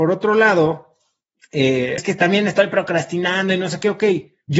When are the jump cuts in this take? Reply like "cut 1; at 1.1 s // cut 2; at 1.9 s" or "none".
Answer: cut 1; at 2.0 s